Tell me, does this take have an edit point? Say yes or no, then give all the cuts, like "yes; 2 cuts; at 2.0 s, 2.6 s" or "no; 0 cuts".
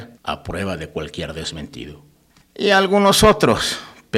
yes; 1 cut; at 2.4 s